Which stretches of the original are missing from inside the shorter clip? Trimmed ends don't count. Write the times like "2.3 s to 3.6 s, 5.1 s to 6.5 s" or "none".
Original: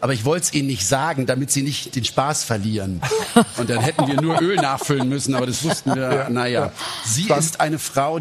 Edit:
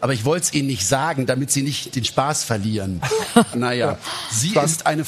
3.5 s to 6.3 s